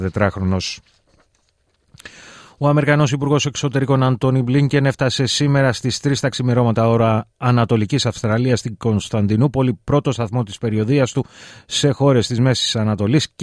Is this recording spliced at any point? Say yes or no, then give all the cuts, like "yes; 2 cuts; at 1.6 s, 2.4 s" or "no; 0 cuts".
no; 0 cuts